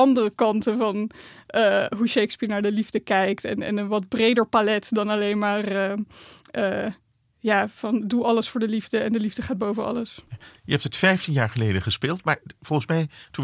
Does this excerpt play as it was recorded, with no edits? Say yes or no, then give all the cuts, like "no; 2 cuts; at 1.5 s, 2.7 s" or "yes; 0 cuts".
yes; 0 cuts